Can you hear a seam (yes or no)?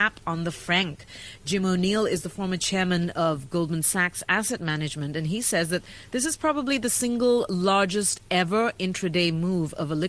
no